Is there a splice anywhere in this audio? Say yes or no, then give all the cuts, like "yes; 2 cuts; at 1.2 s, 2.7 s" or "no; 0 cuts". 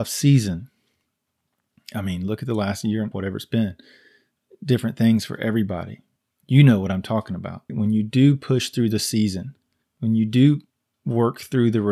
yes; 3 cuts; at 3.1 s, 7.7 s, 9.8 s